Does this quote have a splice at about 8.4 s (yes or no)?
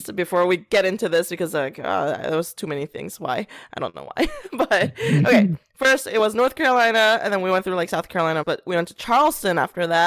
yes